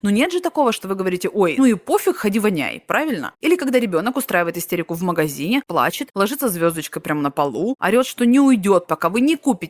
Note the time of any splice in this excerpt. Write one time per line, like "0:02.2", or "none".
0:01.6